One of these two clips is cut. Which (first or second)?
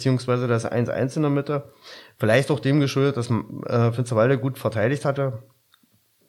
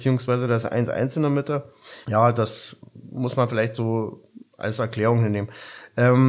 second